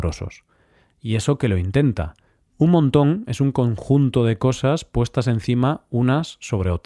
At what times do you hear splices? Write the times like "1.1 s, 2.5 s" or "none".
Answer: 2.5 s